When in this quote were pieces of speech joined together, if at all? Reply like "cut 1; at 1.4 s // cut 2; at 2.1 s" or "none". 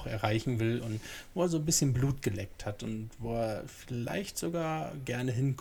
none